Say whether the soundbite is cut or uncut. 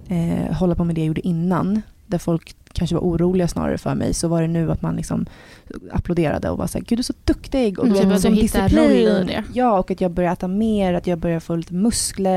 uncut